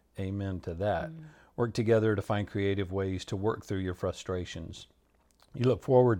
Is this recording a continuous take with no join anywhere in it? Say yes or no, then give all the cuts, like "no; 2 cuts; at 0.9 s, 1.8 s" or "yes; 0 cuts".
yes; 0 cuts